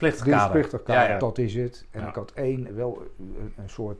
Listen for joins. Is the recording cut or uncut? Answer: cut